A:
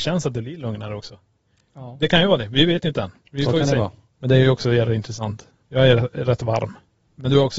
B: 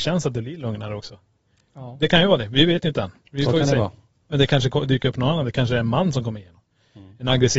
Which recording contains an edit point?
A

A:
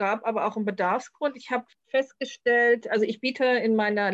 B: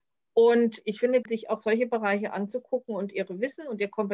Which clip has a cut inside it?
B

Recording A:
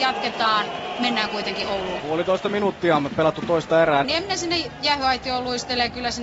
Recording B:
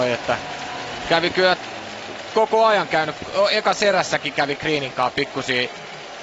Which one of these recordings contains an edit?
A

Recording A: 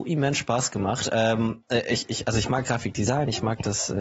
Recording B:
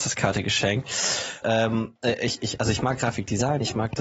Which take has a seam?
B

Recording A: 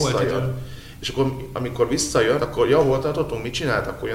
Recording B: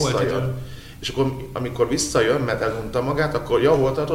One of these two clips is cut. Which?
A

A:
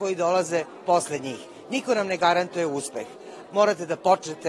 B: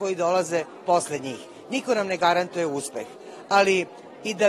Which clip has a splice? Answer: A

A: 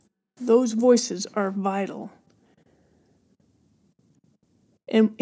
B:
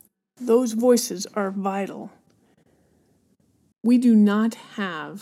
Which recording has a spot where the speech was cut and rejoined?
B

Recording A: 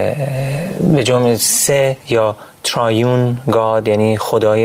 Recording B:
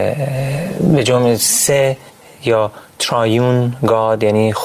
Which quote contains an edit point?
A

